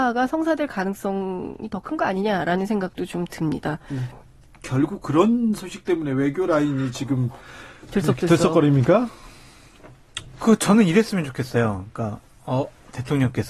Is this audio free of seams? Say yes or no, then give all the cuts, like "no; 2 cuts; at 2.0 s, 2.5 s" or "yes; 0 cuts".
yes; 0 cuts